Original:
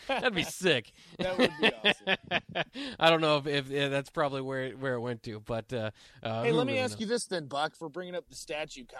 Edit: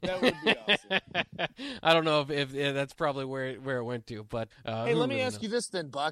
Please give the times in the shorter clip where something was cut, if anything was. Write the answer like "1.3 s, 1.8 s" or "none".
4.5 s